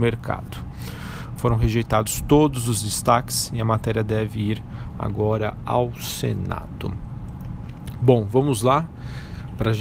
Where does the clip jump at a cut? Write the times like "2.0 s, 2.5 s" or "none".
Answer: 1.4 s

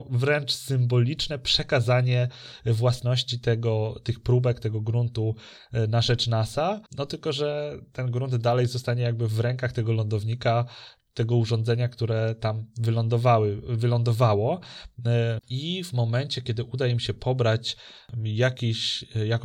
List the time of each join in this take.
6.9 s, 15.4 s

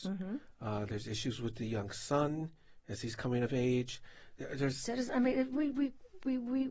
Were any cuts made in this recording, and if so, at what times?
4.4 s

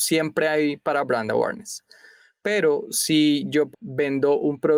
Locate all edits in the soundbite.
3.7 s

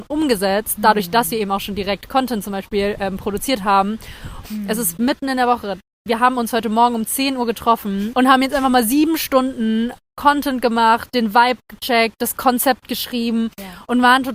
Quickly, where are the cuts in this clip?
4.4 s

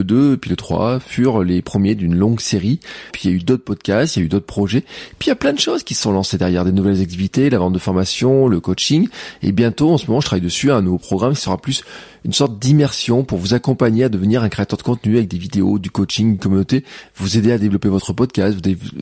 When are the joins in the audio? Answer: 3.1 s

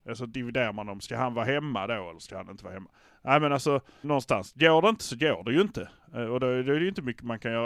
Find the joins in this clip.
4.0 s

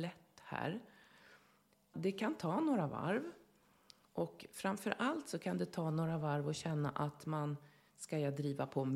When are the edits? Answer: 1.9 s

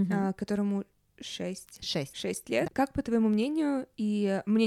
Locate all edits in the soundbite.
2.7 s

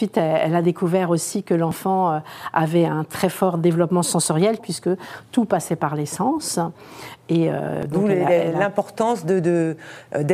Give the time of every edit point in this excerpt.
4.6 s

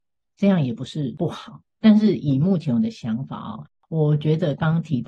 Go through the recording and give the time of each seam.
none

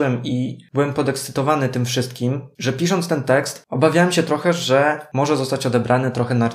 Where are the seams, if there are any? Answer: none

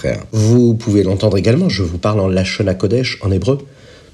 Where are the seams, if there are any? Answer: none

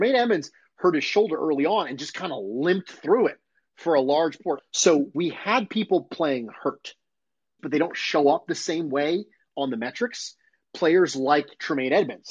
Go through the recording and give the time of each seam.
4.6 s, 7.6 s

